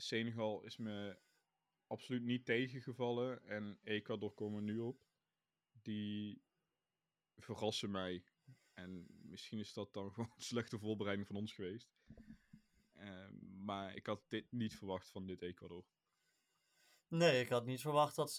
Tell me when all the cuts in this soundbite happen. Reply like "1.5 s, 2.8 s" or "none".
none